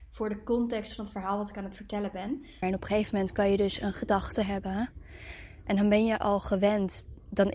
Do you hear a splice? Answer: yes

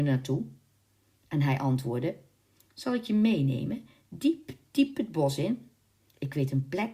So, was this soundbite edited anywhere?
no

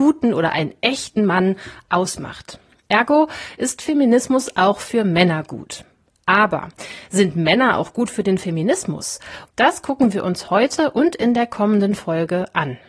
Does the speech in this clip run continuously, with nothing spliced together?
no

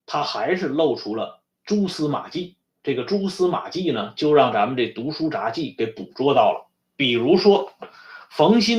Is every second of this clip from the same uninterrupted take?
yes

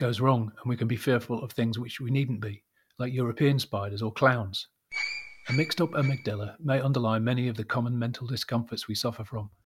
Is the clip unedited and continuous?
yes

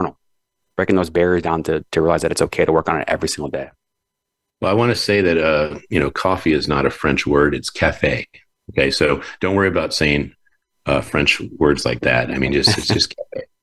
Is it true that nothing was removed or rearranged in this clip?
yes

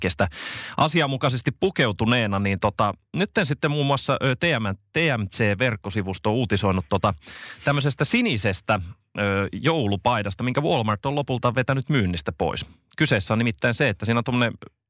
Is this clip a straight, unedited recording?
yes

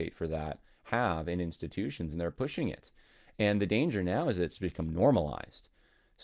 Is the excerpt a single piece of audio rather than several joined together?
yes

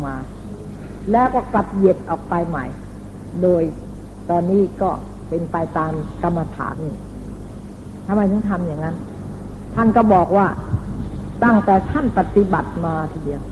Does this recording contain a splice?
yes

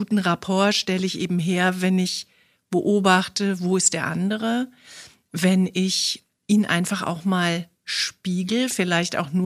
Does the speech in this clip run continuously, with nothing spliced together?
yes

